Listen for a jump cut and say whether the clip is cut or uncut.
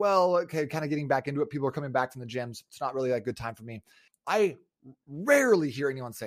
cut